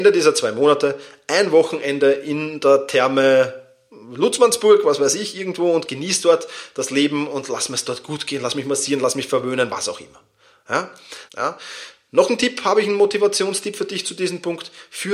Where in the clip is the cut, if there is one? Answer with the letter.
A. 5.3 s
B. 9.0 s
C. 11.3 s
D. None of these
C